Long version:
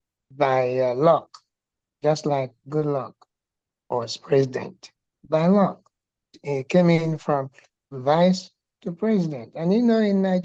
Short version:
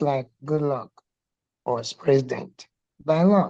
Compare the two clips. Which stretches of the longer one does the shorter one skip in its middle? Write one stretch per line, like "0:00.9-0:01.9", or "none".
none